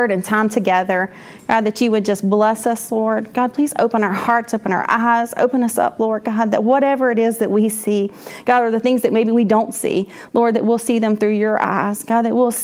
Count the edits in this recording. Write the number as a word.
zero